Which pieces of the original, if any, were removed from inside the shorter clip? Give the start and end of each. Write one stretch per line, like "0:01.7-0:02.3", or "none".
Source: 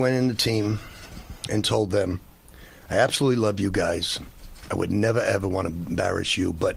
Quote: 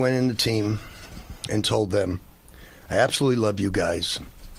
none